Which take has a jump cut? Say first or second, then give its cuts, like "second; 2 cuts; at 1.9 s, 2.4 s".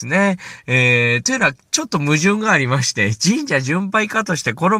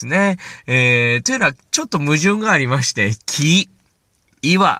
second; 1 cut; at 3.2 s